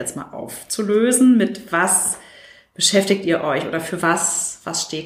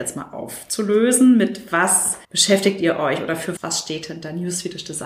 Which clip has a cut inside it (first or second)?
second